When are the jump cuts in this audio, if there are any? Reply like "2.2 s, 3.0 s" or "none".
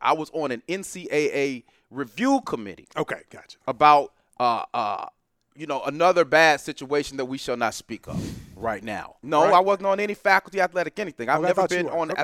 9.2 s